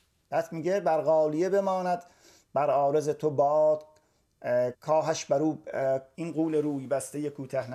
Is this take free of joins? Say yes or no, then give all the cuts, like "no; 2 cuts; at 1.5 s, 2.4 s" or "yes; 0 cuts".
no; 2 cuts; at 4.7 s, 6.1 s